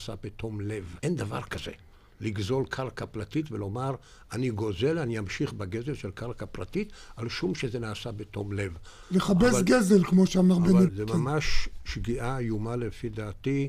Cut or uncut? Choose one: cut